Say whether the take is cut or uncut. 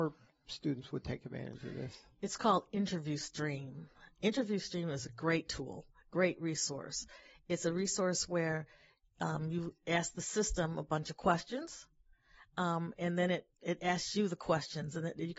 uncut